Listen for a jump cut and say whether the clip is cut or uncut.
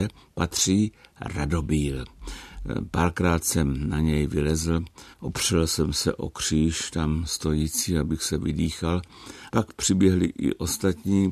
cut